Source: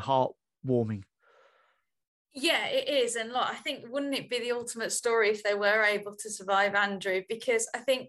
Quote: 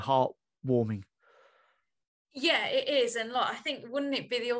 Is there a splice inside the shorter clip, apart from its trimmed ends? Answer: no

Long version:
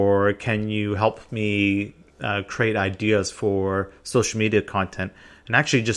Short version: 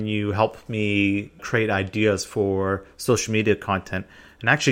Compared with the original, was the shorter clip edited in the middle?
yes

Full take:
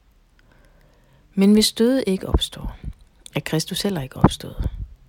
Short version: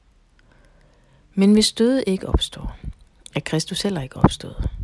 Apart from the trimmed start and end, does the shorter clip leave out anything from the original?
no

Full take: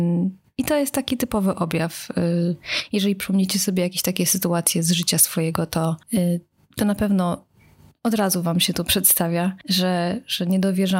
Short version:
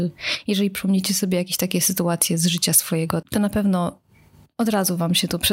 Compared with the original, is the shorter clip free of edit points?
no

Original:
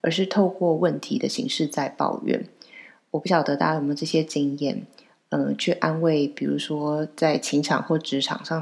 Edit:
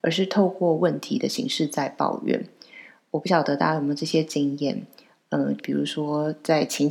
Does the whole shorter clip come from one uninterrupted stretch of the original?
no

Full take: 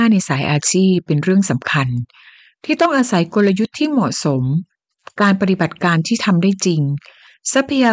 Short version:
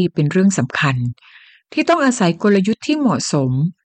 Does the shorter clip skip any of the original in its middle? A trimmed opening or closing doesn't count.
no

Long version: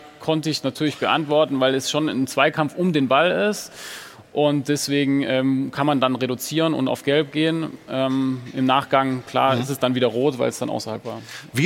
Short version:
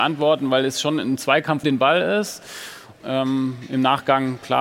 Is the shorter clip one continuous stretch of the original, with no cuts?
no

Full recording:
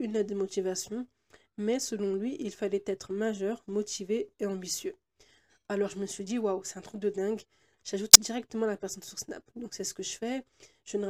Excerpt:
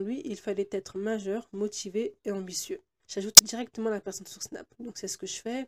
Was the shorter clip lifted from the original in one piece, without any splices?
no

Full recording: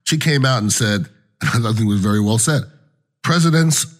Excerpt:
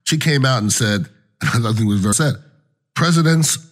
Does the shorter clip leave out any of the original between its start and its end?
yes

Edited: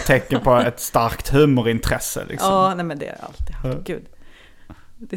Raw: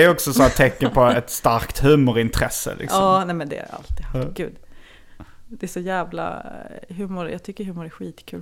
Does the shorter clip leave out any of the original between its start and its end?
no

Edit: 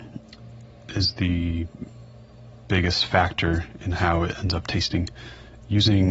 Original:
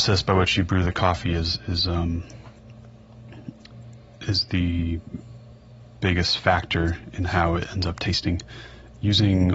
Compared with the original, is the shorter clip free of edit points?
yes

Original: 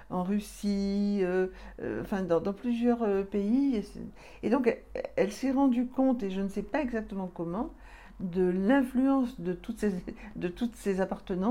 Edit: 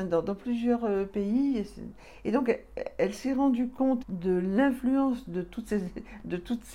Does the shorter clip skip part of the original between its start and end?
yes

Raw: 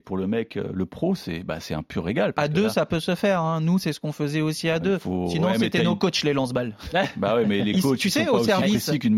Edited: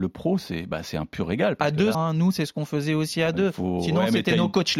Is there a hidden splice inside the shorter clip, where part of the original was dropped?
yes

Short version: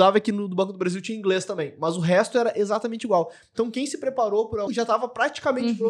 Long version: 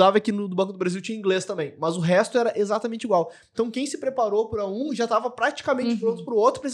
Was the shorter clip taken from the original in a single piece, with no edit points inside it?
no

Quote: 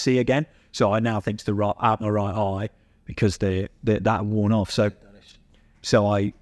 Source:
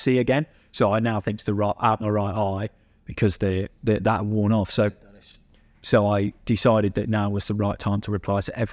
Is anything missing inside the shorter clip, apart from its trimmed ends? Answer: no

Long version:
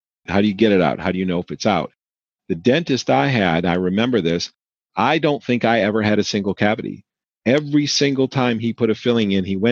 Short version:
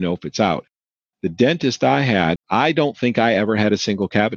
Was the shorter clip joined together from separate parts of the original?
yes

